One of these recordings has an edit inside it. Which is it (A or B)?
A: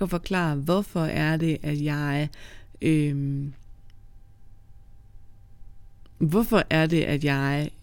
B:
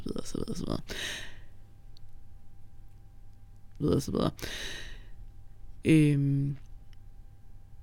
B